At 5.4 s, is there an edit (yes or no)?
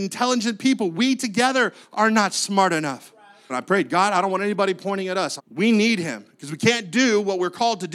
yes